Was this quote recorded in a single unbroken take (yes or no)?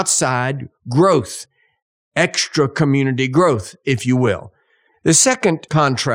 no